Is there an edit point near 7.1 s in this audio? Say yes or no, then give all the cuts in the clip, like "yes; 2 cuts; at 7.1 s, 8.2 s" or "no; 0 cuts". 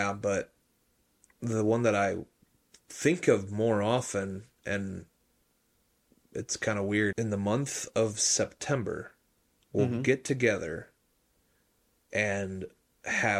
yes; 1 cut; at 7.1 s